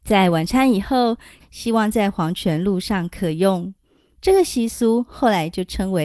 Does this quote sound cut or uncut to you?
cut